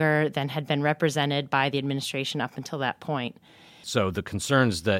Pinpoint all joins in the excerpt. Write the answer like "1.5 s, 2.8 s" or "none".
3.8 s